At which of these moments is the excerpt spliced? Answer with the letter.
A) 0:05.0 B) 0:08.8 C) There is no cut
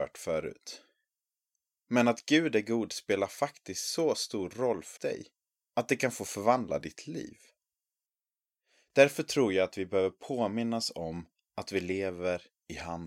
A